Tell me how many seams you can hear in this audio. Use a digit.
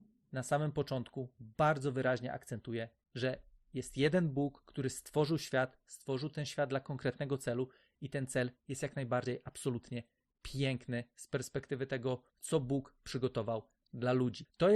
1